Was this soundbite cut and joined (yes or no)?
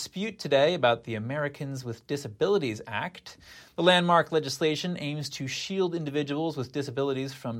no